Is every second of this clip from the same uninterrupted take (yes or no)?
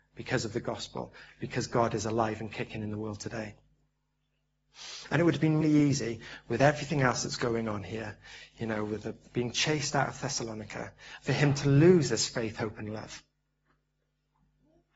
no